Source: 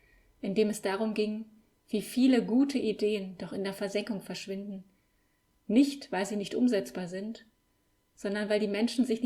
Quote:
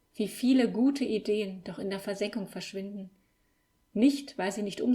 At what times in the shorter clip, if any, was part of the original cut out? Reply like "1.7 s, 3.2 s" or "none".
none